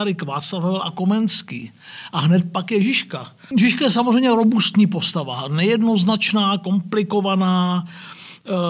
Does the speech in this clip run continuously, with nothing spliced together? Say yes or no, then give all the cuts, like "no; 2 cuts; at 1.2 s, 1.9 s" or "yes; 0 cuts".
no; 1 cut; at 3.5 s